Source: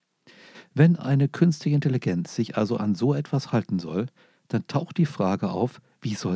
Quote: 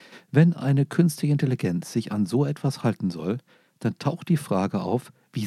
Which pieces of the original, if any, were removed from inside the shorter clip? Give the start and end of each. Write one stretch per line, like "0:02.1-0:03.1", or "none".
0:02.5-0:02.8